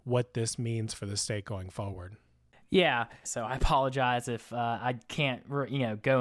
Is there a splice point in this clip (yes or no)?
yes